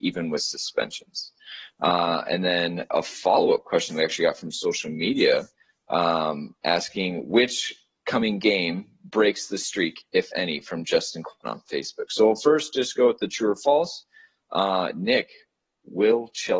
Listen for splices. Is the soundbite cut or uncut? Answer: uncut